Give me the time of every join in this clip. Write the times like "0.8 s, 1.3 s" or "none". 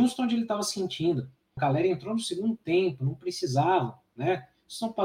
1.6 s